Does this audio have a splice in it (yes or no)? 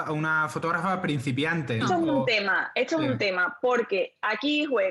yes